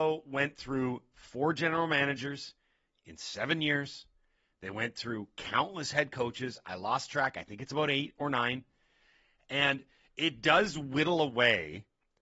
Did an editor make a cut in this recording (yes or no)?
no